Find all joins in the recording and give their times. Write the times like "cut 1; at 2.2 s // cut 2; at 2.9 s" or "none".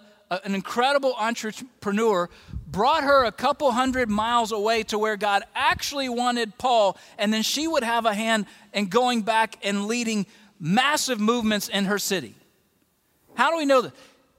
none